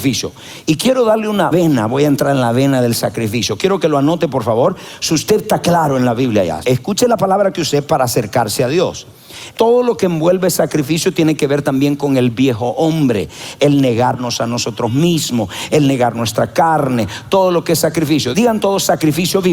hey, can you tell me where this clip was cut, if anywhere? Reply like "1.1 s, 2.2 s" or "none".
6.6 s, 9.5 s